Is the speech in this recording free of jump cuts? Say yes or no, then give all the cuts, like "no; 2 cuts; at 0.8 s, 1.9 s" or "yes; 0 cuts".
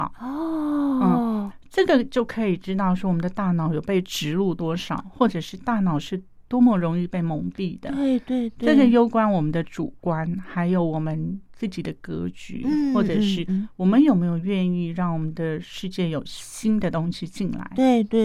yes; 0 cuts